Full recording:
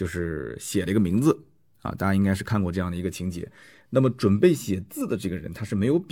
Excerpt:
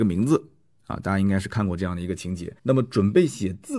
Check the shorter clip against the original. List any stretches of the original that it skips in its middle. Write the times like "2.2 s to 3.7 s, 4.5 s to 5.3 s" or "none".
3.5 s to 3.9 s

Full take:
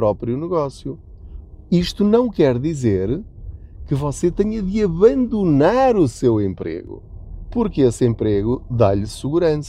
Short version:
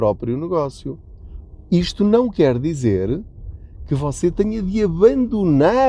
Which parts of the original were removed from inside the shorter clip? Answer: none

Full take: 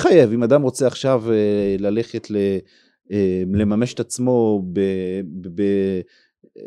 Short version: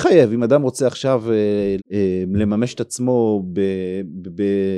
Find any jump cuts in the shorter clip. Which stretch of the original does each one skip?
1.8 s to 3.0 s

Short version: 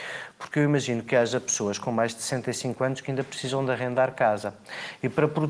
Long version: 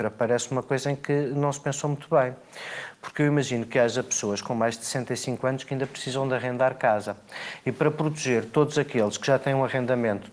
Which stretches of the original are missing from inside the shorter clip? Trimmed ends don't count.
none

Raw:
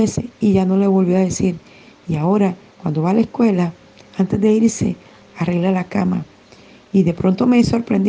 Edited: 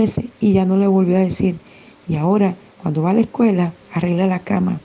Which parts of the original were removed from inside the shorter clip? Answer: 3.8 s to 5.3 s

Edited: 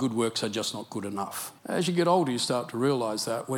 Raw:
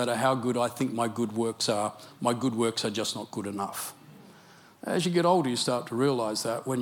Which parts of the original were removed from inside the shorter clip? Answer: 4.0 s to 4.8 s

